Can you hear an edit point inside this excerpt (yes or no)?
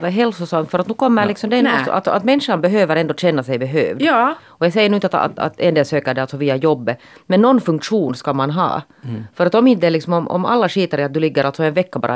yes